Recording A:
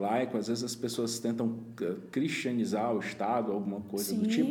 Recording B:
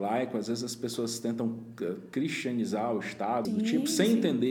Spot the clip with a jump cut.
B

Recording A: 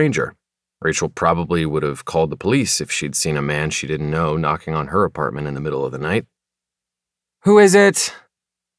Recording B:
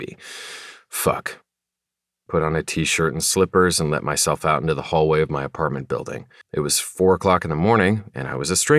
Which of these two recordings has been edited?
B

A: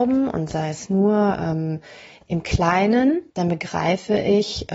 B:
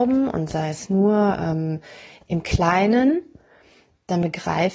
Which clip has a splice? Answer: A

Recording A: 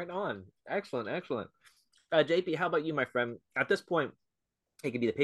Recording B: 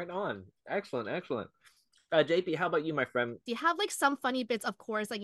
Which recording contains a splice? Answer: B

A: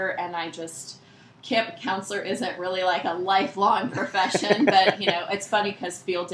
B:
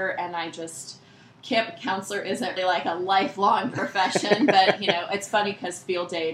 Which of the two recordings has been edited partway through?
B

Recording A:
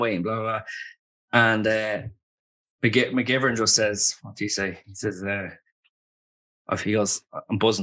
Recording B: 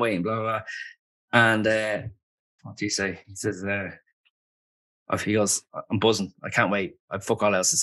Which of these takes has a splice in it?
B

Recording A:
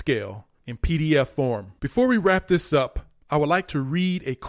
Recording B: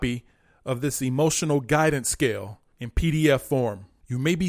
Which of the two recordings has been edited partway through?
A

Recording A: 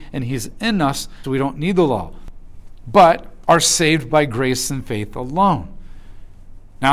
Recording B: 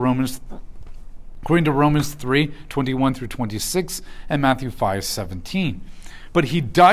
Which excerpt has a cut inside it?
A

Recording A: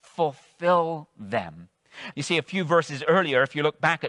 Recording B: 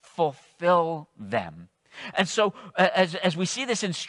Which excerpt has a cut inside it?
A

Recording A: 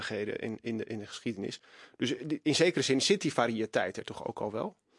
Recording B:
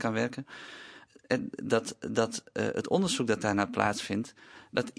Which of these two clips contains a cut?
B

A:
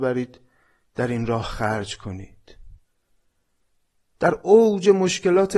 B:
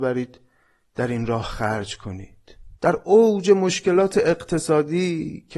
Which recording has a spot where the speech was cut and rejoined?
B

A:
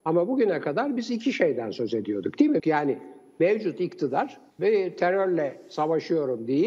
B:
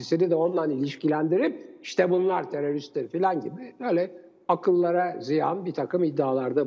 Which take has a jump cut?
A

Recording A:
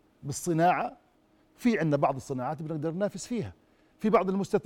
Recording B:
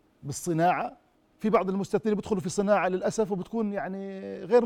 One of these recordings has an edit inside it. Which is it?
B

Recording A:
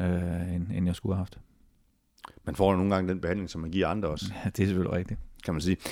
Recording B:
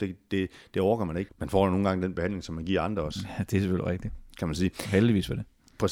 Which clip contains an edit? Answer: B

